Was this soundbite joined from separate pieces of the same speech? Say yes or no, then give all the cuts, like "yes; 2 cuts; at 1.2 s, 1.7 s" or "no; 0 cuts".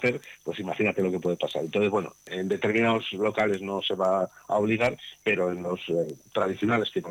no; 0 cuts